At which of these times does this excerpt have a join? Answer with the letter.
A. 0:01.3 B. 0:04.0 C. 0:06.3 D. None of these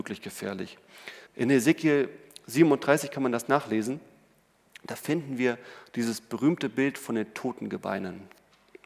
A